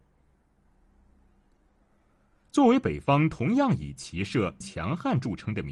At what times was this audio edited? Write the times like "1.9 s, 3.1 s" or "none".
4.6 s